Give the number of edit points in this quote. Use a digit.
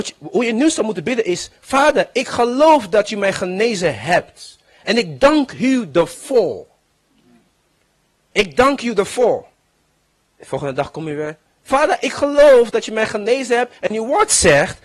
0